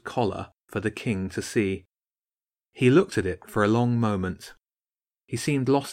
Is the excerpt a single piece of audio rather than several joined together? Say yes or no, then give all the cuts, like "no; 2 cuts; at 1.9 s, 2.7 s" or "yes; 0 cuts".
yes; 0 cuts